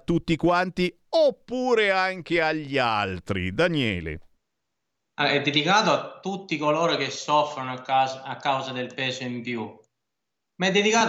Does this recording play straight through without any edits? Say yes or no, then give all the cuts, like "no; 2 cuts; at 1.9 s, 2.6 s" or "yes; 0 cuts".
yes; 0 cuts